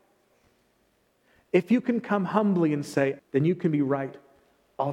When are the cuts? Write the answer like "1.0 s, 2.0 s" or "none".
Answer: 3.2 s